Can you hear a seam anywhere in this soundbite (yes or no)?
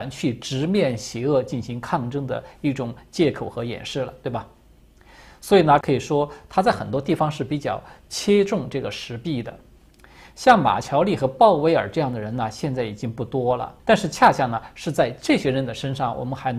yes